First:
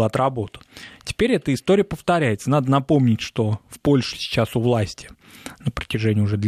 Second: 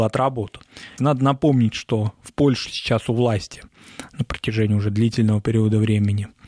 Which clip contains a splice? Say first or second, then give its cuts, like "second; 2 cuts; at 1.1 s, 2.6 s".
second; 1 cut; at 1.0 s